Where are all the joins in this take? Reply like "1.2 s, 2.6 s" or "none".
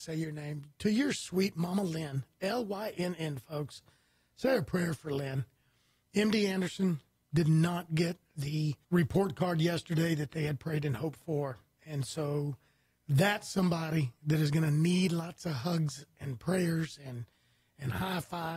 8.8 s